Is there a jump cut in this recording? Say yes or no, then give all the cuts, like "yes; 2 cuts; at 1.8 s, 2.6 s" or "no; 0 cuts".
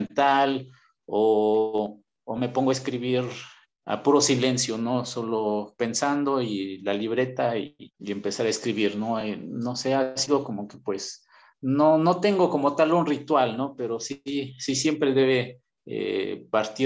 no; 0 cuts